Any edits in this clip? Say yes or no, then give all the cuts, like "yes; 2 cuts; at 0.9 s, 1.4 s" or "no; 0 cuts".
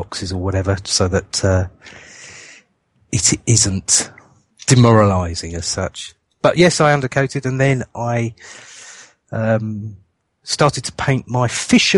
no; 0 cuts